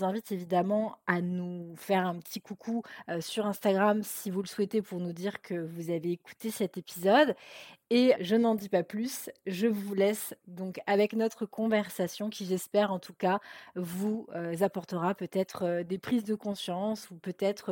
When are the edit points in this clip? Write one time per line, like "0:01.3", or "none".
0:08.1